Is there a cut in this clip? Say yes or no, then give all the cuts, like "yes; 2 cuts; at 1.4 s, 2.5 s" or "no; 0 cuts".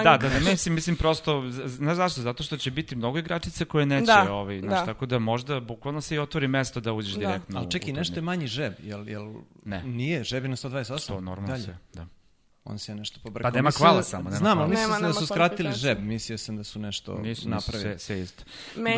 no; 0 cuts